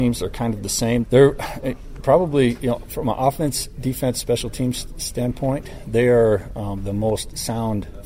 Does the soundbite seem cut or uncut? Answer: cut